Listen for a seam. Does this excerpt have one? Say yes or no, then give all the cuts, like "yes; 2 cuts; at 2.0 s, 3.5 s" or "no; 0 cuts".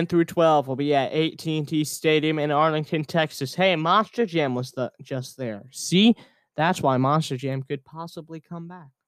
no; 0 cuts